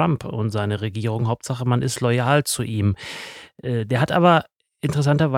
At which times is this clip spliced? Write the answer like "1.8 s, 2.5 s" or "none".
none